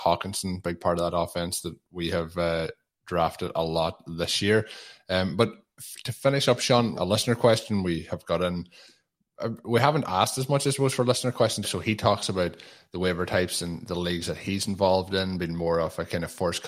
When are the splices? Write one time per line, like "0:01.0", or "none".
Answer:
0:07.0
0:11.6